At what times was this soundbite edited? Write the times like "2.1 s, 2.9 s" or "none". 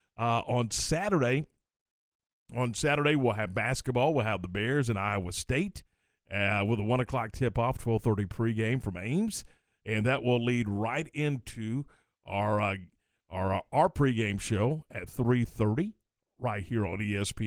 none